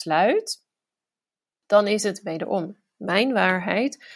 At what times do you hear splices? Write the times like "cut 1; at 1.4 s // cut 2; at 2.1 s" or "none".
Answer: none